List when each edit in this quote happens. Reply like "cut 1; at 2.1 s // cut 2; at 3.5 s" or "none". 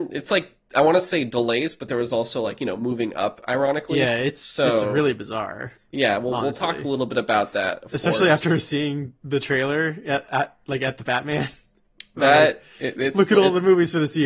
none